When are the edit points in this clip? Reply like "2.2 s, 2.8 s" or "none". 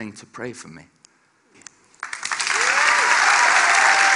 1.5 s